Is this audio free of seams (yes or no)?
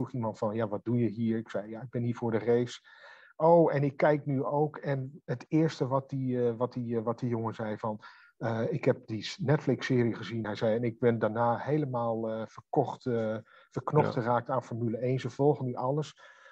yes